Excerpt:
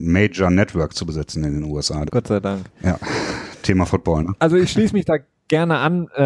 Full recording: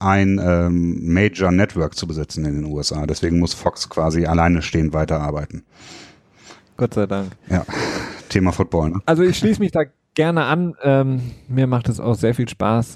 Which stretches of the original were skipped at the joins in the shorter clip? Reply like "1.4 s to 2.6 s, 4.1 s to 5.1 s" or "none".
3.1 s to 6.7 s